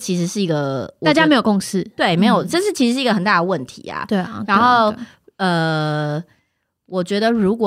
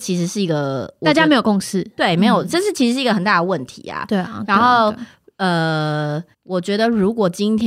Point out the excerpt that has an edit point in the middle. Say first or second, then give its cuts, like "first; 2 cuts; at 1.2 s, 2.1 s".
second; 1 cut; at 6.3 s